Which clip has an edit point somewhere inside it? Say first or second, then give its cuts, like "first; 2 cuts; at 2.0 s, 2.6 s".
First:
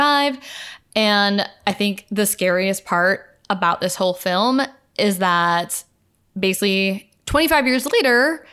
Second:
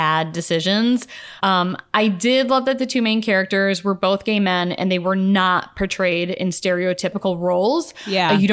second; 1 cut; at 1.4 s